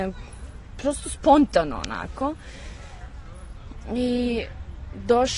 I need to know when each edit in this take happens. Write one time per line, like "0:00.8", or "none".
none